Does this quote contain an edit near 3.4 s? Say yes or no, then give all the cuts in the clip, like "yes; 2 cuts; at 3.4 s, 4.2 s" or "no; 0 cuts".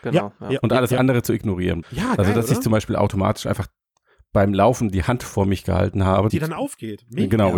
no; 2 cuts; at 1.8 s, 6.3 s